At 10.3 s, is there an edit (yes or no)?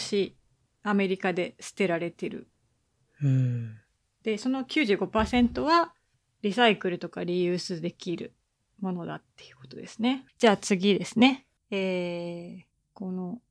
yes